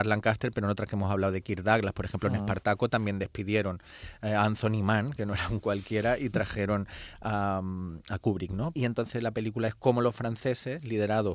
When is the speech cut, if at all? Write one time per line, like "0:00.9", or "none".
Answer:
0:08.7